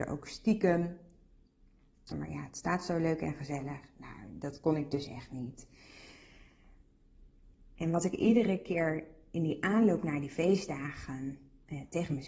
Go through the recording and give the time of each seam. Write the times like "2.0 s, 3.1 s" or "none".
2.1 s